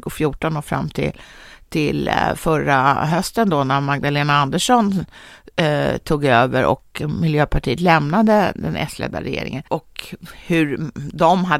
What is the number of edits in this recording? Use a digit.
0